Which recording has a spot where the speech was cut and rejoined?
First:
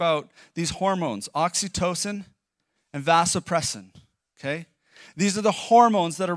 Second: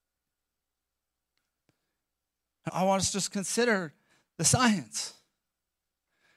second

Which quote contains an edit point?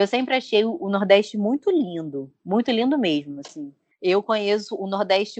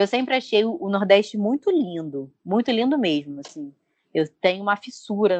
first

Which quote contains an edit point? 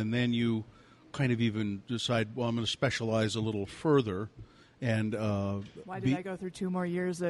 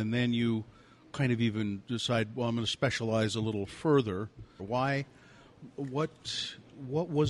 second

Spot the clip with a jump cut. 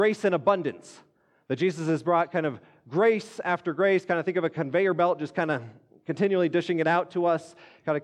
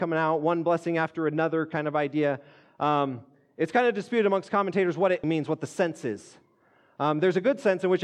second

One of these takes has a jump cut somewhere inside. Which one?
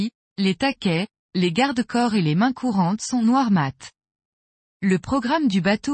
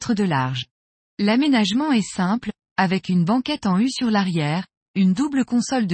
second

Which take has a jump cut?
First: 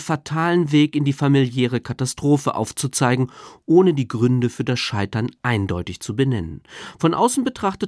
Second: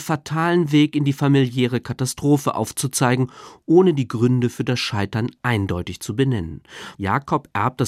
second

